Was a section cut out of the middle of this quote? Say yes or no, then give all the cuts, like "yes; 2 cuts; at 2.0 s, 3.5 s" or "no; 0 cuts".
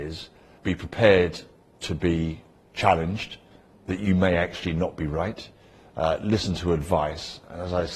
no; 0 cuts